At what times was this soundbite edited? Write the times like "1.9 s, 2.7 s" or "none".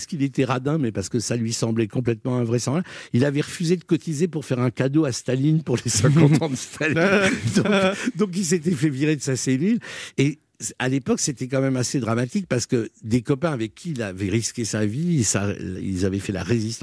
none